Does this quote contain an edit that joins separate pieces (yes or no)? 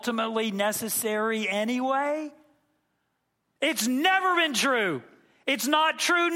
yes